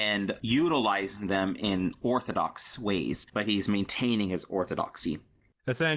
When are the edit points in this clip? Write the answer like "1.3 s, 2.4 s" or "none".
3.3 s